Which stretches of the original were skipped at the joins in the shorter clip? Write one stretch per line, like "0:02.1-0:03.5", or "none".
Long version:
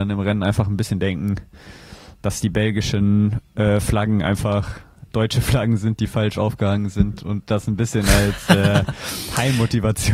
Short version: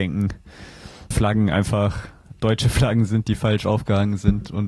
0:02.2-0:03.8